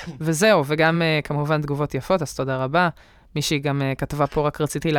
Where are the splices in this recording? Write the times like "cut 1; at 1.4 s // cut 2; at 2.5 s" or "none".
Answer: none